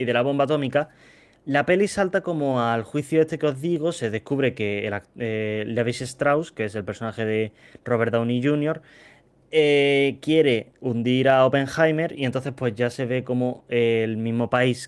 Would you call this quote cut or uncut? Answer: uncut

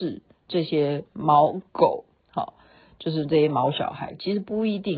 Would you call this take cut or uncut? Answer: uncut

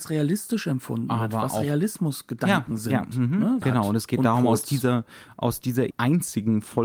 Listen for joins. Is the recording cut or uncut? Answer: cut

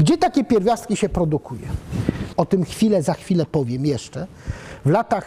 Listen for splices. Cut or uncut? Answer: cut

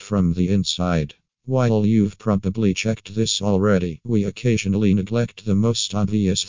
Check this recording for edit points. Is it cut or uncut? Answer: uncut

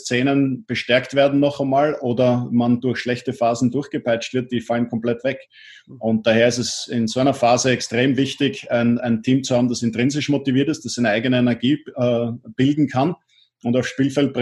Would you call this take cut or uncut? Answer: uncut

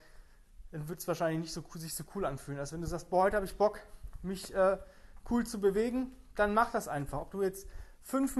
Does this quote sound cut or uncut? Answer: uncut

